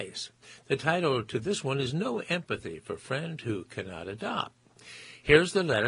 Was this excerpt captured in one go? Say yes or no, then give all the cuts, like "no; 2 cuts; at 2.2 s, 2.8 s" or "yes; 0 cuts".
yes; 0 cuts